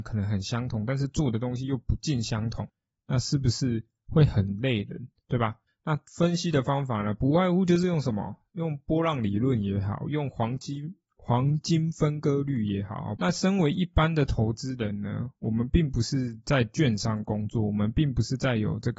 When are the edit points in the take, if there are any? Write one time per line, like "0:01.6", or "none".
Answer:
0:05.7
0:13.2